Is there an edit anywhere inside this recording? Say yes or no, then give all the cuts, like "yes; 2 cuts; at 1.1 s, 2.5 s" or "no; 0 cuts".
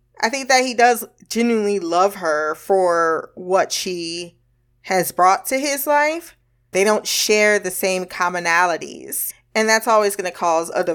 yes; 2 cuts; at 6.7 s, 9.3 s